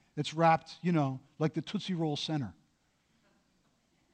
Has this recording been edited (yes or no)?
no